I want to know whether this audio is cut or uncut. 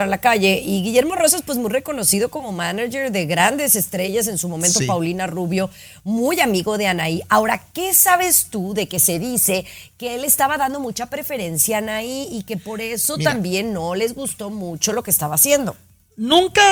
uncut